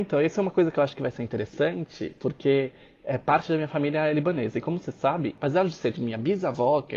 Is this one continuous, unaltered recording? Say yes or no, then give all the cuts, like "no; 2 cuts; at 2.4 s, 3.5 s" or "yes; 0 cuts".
no; 1 cut; at 5.9 s